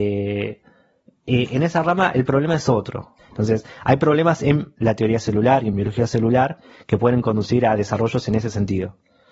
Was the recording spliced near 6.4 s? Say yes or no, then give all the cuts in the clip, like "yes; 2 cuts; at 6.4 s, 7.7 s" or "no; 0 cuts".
no; 2 cuts; at 3.2 s, 4.8 s